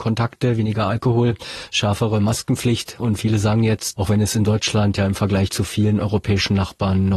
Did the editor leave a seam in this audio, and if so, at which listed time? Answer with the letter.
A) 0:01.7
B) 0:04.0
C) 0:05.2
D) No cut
B